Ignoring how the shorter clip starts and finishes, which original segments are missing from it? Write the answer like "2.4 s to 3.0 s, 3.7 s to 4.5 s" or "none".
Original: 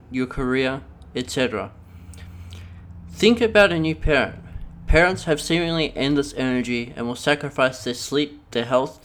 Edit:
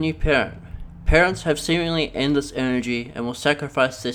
none